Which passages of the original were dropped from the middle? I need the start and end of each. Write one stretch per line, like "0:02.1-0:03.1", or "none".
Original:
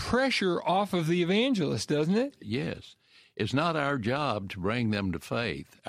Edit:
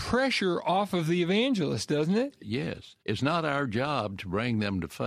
0:03.0-0:03.3